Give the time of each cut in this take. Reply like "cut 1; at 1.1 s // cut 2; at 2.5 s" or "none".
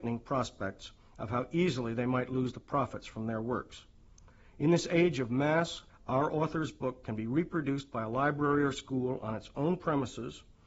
cut 1; at 5.9 s